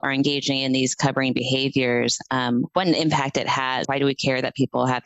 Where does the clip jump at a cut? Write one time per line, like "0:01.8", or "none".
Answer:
0:03.8